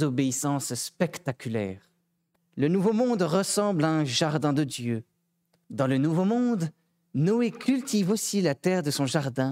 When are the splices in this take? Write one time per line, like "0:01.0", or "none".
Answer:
0:02.4
0:05.6